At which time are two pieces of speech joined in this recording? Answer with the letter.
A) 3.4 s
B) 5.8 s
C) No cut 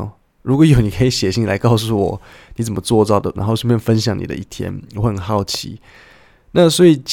A